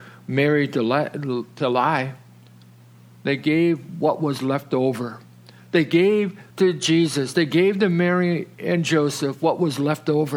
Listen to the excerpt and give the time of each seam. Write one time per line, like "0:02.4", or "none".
0:03.1
0:06.5